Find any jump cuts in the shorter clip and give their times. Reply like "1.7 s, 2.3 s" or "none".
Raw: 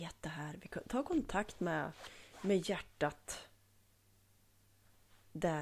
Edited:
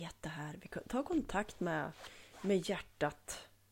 none

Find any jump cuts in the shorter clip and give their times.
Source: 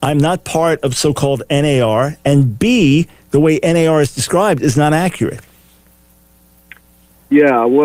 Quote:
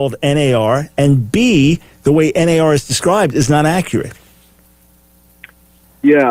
none

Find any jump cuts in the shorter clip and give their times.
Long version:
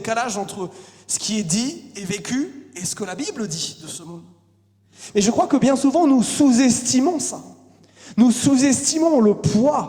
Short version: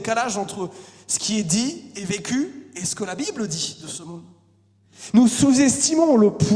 5.1 s

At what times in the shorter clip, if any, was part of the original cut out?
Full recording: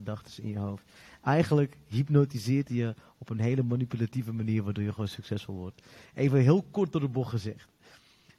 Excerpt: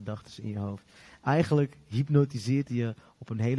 none

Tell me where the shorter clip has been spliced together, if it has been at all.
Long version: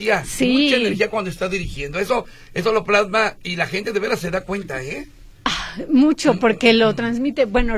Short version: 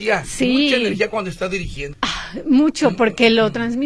1.9 s

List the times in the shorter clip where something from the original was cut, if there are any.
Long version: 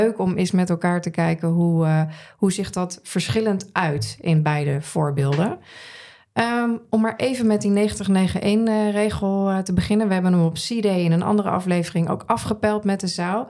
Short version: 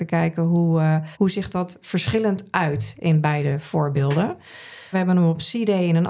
1.1 s, 4.9 s

